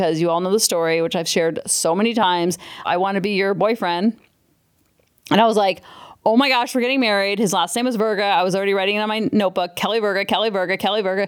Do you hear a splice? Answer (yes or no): yes